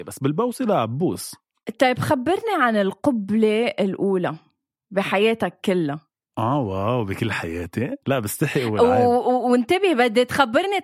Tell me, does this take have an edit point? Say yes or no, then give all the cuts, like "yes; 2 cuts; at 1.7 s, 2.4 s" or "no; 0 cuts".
yes; 1 cut; at 8.0 s